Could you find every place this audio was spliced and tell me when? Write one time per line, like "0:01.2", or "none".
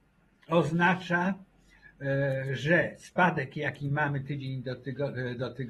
none